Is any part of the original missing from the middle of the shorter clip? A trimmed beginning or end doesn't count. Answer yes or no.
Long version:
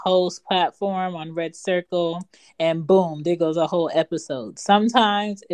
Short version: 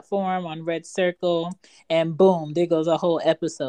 no